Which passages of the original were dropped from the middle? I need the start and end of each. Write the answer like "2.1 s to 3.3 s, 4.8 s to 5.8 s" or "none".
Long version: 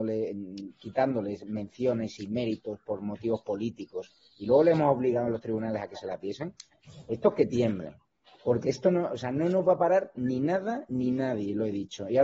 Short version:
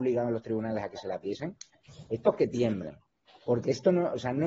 none

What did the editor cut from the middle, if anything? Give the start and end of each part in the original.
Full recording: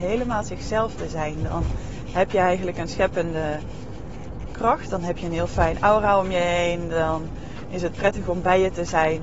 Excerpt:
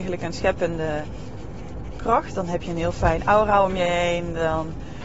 none

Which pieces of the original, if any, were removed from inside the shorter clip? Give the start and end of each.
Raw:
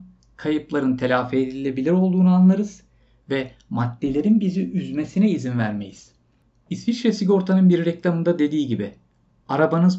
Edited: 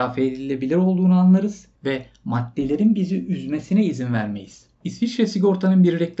2.9 s to 3.2 s, 6.2 s to 6.6 s

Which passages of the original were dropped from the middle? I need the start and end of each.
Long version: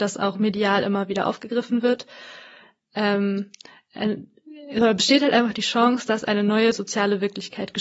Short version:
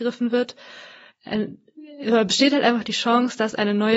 2.6 s to 3.8 s

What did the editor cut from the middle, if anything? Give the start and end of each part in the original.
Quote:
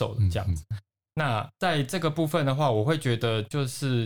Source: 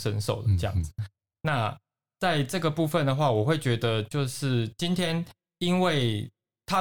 1.8 s to 2.1 s

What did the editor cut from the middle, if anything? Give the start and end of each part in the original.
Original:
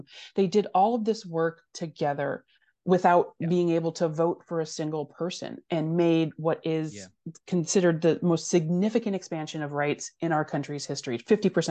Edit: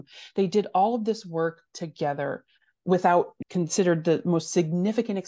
3.4 s to 7.4 s

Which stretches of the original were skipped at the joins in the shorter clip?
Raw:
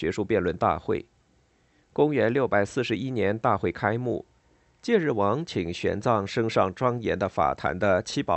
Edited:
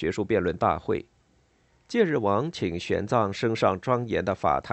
1.7 s to 4.6 s

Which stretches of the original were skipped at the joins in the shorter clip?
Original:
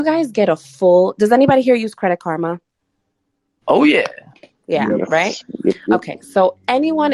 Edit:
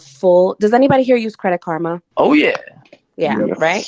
2.7 s to 3.6 s

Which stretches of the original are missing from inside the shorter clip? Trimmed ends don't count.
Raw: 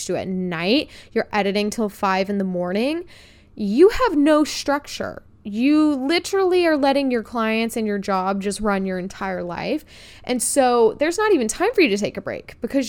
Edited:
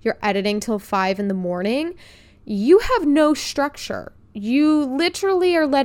none

